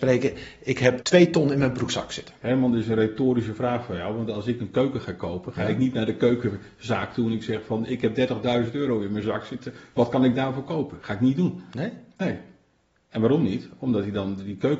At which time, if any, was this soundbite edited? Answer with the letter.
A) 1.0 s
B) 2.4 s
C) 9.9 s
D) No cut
A